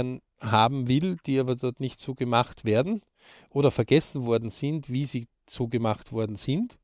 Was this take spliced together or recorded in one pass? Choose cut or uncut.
uncut